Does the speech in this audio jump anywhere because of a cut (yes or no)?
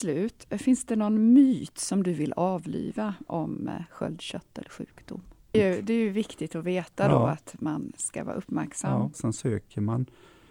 yes